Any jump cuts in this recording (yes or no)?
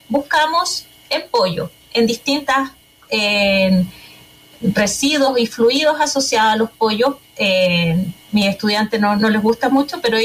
no